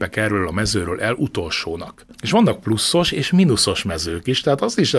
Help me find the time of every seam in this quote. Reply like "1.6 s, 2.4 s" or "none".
2.1 s